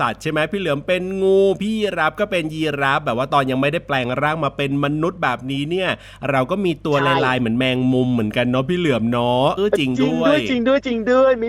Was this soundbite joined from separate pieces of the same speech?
yes; 1 cut; at 9.6 s

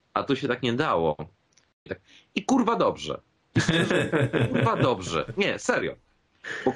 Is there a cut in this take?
yes; 1 cut; at 1.9 s

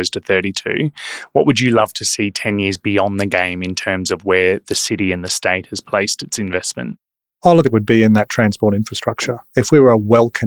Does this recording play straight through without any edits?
no; 1 cut; at 7.6 s

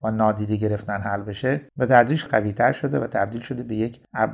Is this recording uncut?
no; 1 cut; at 2.3 s

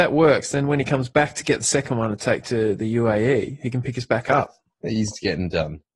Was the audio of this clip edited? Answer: yes; 1 cut; at 4.7 s

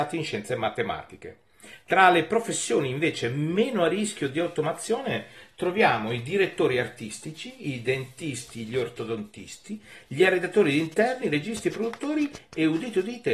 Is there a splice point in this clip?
no; 0 cuts

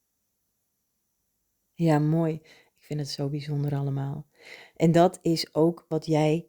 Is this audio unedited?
yes; 0 cuts

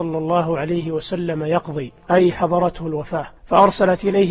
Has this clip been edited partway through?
yes; 1 cut; at 3.4 s

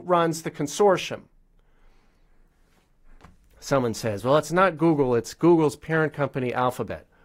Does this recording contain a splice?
no; 0 cuts

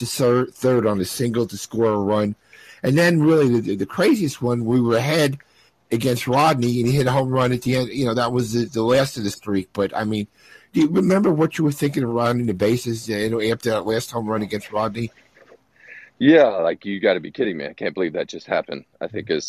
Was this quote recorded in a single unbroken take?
yes; 0 cuts

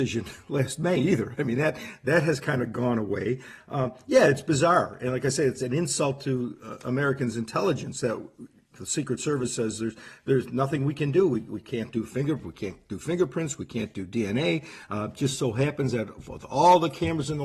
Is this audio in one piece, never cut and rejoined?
yes; 0 cuts

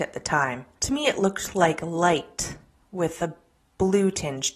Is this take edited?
no; 0 cuts

